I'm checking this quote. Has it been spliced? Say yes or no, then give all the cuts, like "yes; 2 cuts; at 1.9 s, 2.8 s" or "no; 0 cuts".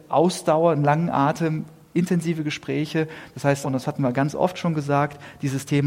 yes; 1 cut; at 3.6 s